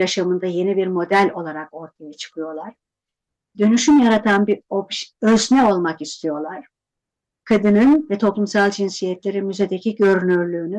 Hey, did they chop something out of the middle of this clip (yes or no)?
no